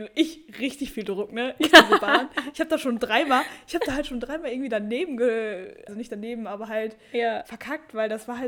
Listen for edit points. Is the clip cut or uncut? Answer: cut